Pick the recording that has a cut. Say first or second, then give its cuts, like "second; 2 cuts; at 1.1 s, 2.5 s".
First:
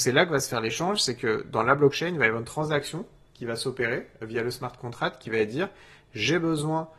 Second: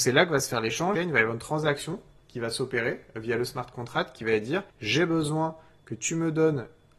second; 2 cuts; at 1.0 s, 4.7 s